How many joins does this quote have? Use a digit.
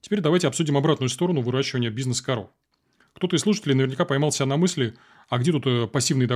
0